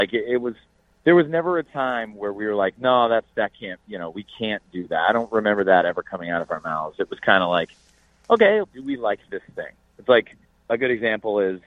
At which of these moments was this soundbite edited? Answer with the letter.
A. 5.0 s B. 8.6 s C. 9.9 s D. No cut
B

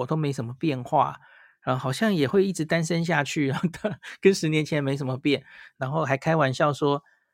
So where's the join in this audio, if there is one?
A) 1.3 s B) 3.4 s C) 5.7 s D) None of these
C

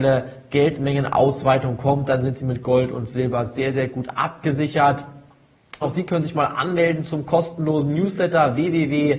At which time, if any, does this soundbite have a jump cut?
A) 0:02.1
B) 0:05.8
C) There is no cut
B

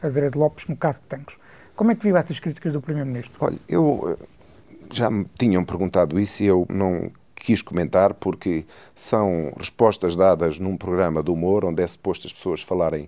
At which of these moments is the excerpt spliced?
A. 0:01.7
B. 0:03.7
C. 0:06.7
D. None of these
C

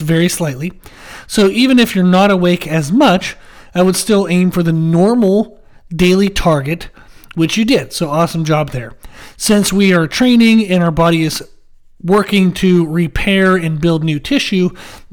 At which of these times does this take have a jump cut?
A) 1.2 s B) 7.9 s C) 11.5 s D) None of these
D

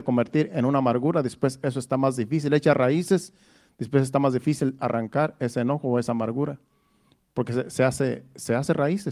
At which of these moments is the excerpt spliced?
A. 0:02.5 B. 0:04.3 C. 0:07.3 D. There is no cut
D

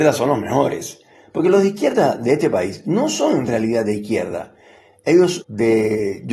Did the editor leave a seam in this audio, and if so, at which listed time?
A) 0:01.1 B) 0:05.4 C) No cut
B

